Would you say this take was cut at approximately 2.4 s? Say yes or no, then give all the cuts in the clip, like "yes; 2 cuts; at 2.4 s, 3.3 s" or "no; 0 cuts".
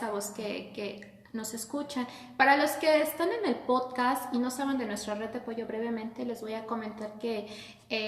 no; 0 cuts